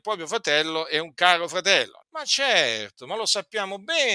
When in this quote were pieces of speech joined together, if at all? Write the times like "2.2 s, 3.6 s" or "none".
2.0 s